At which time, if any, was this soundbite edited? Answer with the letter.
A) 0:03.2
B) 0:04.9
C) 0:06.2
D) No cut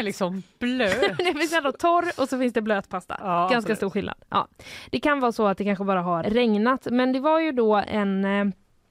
C